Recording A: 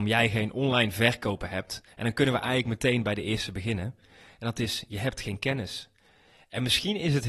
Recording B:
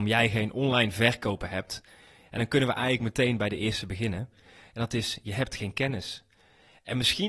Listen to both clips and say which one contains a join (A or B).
A